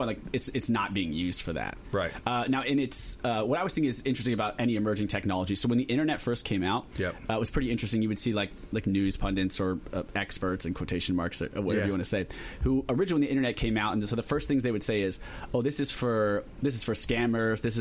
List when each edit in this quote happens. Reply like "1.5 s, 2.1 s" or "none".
none